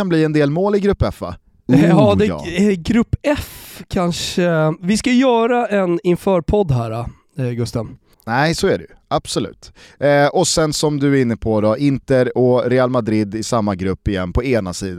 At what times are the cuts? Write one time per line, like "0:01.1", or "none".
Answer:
0:08.1

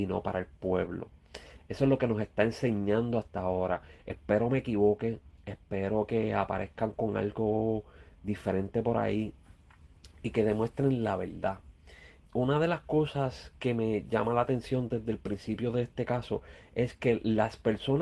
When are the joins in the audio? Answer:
0:05.4
0:12.3

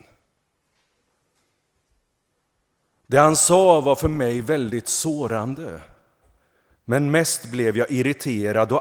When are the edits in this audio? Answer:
none

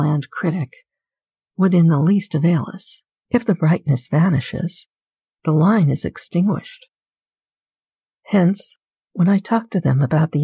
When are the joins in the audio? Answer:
0:03.2
0:09.1

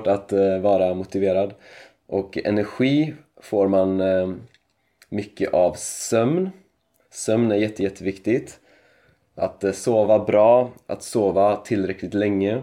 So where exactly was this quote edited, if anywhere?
none

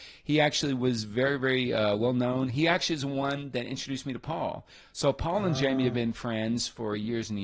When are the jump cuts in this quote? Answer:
none

